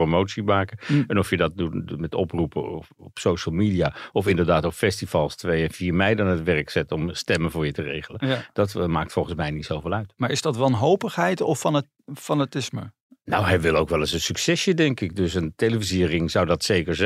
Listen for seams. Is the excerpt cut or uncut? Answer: uncut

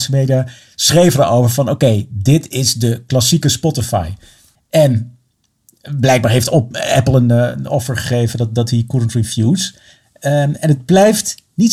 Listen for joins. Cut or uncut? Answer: cut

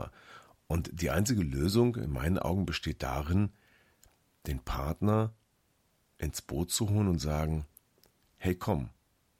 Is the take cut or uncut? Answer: uncut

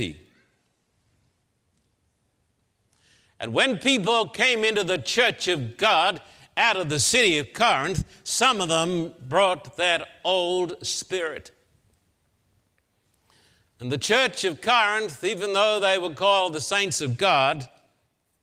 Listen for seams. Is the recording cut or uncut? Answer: uncut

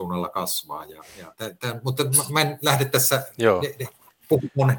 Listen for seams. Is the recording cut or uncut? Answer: uncut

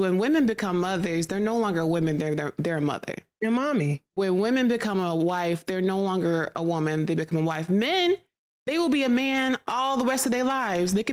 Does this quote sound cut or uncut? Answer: uncut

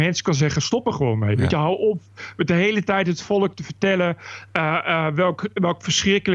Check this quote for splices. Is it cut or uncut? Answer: uncut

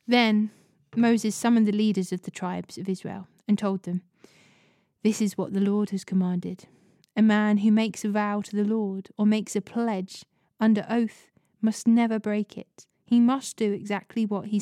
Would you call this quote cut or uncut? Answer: uncut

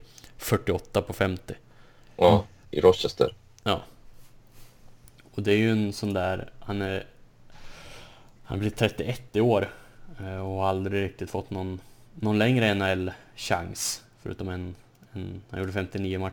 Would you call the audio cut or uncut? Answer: cut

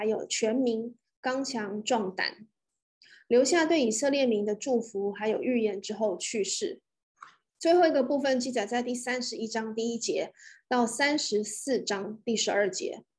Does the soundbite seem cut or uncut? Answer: cut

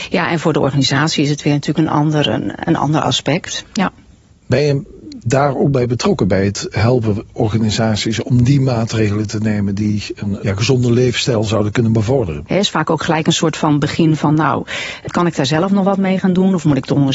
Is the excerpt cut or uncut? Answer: cut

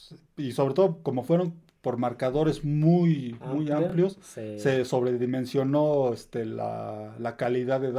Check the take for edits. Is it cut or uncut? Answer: uncut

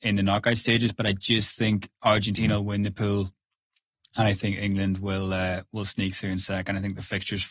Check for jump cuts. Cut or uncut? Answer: uncut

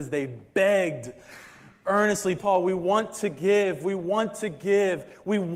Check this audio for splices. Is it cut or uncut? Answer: cut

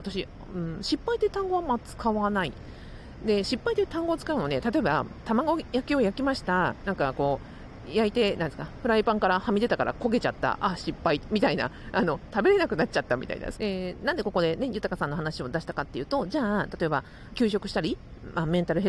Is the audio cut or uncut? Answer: cut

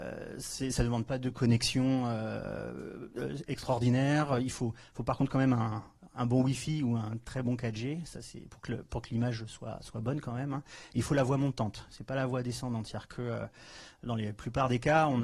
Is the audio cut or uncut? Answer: uncut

